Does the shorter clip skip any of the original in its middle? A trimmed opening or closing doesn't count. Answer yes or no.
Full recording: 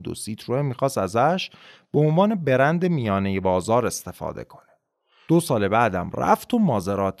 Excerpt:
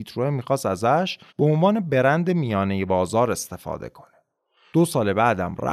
yes